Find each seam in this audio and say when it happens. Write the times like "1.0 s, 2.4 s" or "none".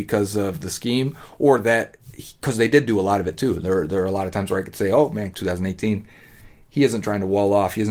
5.3 s